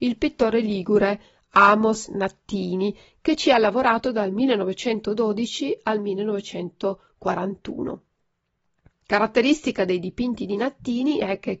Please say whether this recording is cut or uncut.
uncut